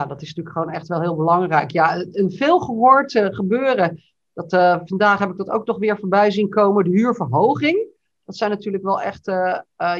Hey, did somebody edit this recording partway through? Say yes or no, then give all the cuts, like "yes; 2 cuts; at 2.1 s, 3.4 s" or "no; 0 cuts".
no; 0 cuts